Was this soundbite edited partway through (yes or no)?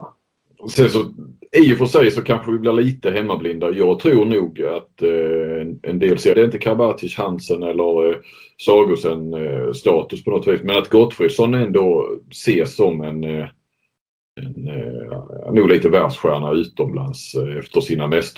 yes